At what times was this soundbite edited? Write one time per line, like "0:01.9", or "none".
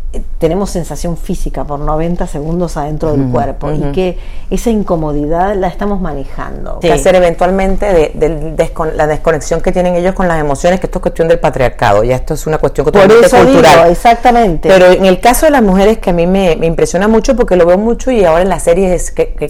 0:06.8